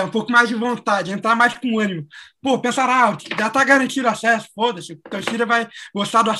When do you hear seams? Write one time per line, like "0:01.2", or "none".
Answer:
none